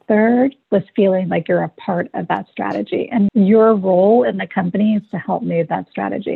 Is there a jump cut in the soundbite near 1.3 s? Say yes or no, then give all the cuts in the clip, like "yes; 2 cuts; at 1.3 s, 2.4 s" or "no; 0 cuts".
no; 1 cut; at 3.3 s